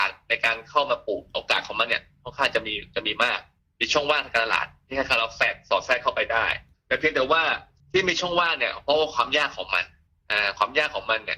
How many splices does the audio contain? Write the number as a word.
zero